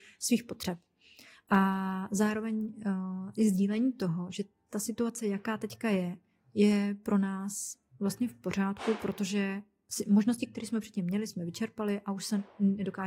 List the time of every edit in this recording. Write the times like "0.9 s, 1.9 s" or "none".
none